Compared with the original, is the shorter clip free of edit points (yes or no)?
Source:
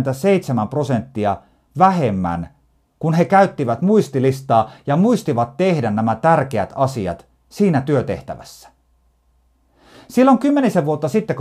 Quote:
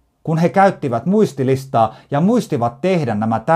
yes